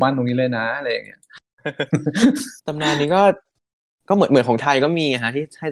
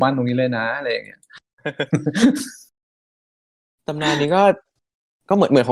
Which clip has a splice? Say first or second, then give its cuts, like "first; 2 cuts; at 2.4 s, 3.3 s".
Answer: first; 1 cut; at 2.6 s